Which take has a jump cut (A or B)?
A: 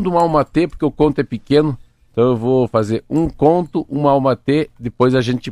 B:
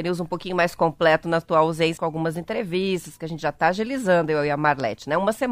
B